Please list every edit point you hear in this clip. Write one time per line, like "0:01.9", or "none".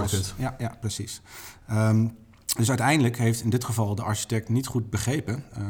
none